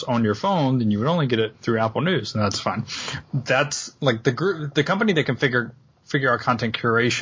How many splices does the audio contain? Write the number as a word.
one